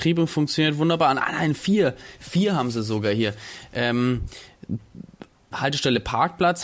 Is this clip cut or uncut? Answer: cut